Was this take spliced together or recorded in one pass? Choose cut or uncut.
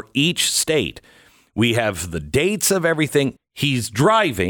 cut